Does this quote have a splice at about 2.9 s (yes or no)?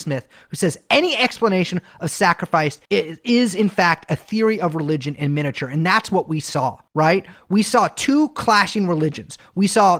yes